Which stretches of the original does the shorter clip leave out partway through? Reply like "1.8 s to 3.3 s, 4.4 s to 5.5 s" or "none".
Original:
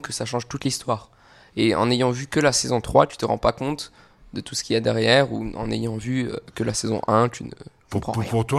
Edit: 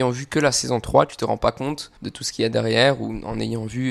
4.0 s to 4.3 s